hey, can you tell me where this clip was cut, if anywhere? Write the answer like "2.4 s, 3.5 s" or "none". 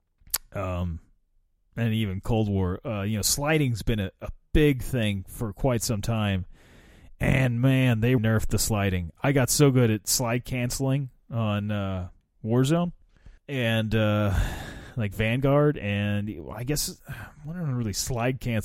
8.2 s, 13.4 s